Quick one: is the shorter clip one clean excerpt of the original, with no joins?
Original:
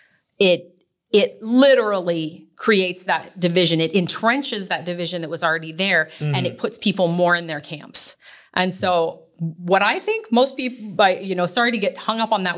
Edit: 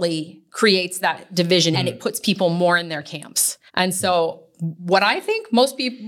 no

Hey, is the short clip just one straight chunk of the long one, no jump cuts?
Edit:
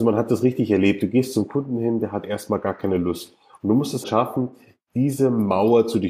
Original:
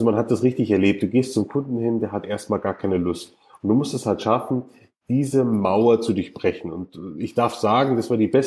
no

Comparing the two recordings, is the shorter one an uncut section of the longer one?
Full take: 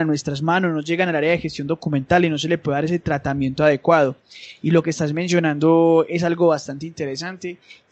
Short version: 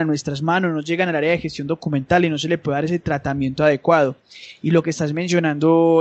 yes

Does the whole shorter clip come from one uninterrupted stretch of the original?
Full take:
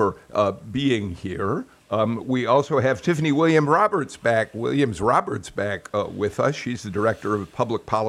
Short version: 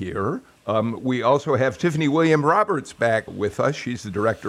no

